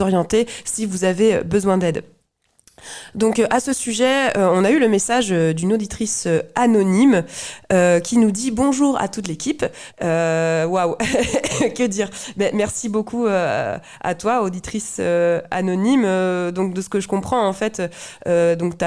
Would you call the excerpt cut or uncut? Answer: cut